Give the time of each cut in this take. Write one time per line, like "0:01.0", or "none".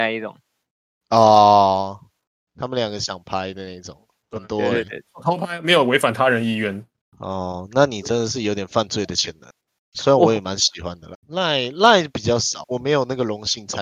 0:07.0
0:11.1
0:12.6